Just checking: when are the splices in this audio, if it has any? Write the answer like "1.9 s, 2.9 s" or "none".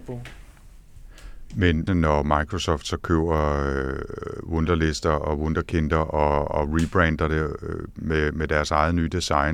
1.9 s